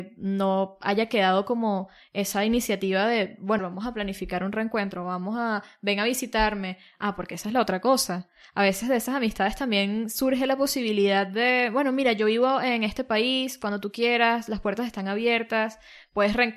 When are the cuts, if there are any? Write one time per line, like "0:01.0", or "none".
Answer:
0:03.6